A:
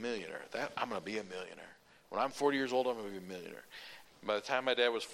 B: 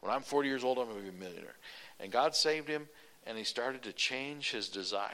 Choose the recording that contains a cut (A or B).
A